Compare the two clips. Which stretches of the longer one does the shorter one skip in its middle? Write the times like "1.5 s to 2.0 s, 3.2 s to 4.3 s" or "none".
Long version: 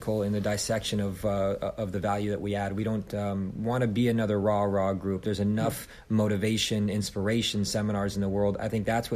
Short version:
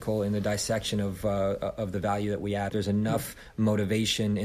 2.7 s to 5.2 s